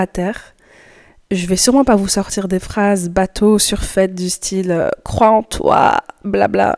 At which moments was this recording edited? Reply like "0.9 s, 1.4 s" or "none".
none

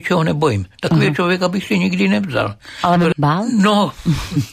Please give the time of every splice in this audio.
3.1 s

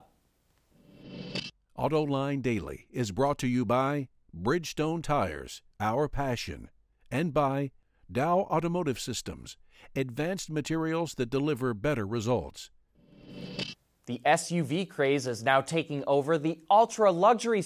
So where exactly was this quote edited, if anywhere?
5.7 s

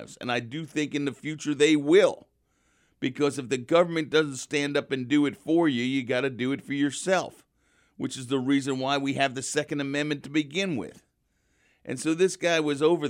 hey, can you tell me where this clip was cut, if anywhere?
none

